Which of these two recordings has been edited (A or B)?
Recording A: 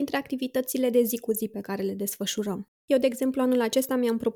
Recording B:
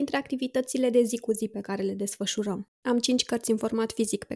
B